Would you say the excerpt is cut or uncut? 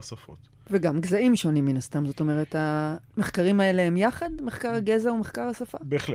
uncut